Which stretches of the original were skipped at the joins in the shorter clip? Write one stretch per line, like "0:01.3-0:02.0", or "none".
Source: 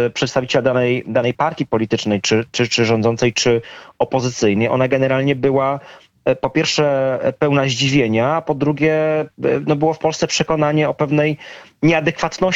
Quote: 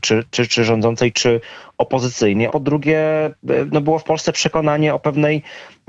0:04.7-0:08.4